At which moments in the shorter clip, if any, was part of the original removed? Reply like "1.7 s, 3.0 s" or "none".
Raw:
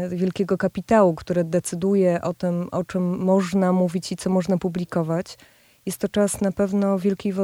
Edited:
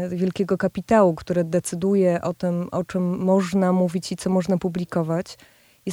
none